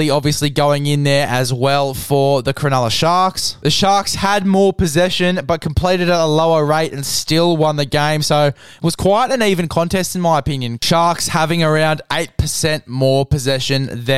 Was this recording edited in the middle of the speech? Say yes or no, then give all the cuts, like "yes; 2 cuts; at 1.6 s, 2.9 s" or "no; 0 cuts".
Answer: yes; 1 cut; at 10.8 s